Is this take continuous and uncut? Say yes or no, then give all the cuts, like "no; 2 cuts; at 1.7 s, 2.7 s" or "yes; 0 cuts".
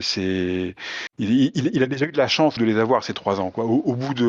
no; 2 cuts; at 1.1 s, 2.6 s